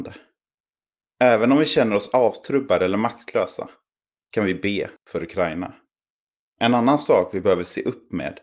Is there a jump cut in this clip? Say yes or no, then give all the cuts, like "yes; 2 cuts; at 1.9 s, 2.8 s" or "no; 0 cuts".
yes; 2 cuts; at 1.0 s, 6.4 s